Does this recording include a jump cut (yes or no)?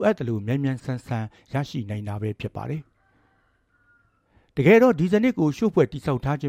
no